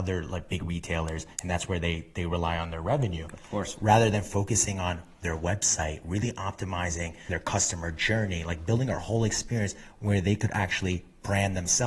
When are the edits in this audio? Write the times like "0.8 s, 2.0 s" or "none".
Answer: none